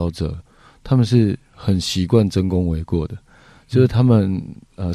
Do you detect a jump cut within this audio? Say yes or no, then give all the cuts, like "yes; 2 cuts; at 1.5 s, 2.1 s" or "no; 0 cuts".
no; 0 cuts